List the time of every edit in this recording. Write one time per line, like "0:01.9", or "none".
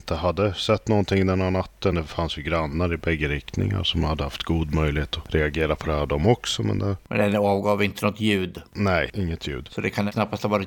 none